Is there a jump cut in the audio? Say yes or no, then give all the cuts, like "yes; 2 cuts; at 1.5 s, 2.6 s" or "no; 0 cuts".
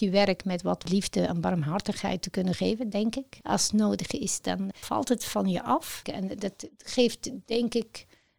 yes; 3 cuts; at 3.4 s, 4.7 s, 6.0 s